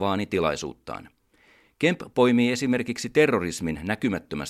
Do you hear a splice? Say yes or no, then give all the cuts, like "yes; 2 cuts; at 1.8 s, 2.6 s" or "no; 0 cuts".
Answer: no; 0 cuts